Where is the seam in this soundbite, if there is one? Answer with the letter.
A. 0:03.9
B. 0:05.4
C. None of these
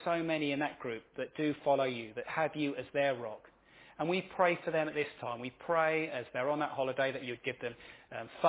C